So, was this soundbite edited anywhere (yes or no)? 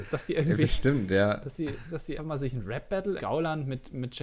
yes